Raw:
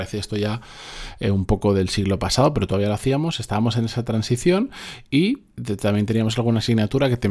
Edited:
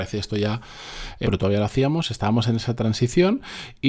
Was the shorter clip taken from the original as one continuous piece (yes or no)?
no